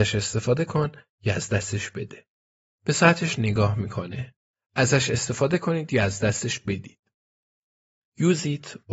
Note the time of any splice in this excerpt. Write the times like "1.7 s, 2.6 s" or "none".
4.6 s